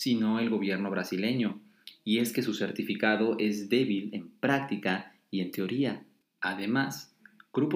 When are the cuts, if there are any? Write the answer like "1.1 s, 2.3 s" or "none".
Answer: 6.2 s